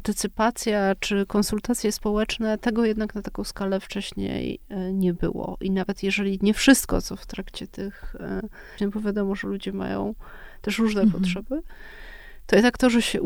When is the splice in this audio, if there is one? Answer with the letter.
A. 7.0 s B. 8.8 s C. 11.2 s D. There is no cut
B